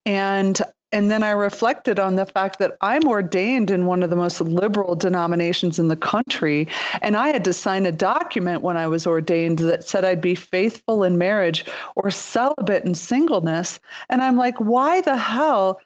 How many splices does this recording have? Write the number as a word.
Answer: zero